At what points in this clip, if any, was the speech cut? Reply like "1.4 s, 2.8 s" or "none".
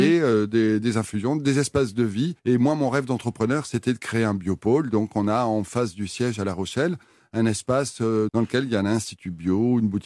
2.4 s, 8.3 s

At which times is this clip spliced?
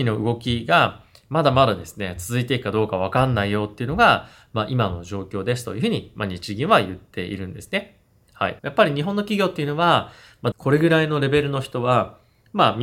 8.6 s, 10.5 s

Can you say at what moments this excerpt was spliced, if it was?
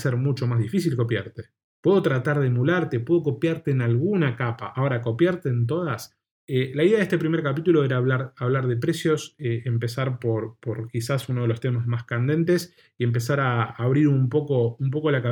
6.3 s

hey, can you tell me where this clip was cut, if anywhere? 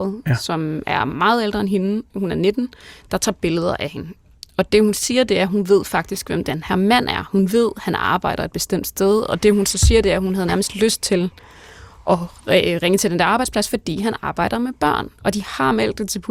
none

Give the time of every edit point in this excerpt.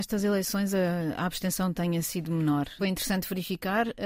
2.8 s

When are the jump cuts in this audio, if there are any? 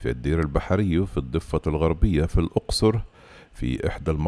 none

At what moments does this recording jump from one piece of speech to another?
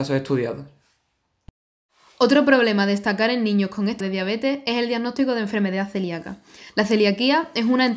4.0 s

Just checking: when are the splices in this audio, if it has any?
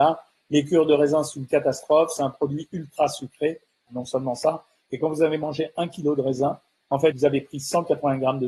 3.9 s, 7.1 s

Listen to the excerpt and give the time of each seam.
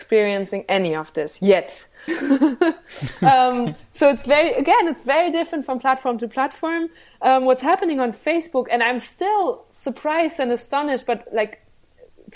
2.1 s

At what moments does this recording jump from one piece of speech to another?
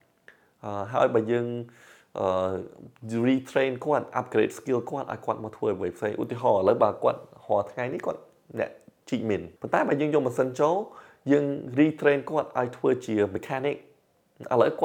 9.6 s

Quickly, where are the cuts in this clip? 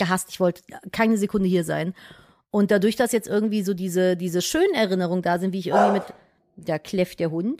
none

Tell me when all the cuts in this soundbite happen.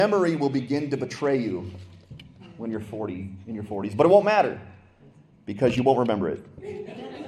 none

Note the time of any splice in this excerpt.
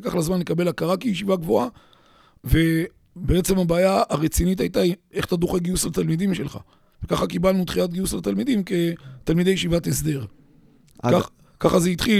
6.9 s

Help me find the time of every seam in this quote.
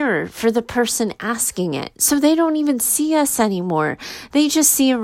none

